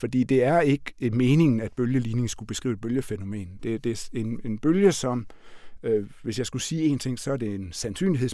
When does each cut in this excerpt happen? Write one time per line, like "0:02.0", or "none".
0:03.6